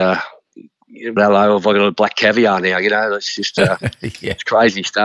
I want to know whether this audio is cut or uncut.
cut